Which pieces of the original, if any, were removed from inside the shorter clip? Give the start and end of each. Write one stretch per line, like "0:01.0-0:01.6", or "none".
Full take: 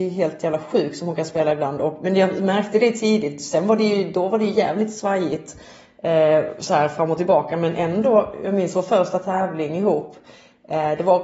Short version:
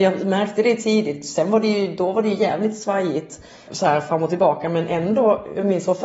0:05.8-0:06.6